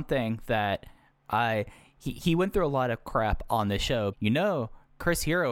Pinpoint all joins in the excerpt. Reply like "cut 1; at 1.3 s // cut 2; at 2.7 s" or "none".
cut 1; at 4.1 s